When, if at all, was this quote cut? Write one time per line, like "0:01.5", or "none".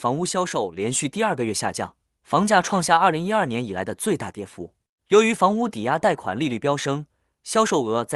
none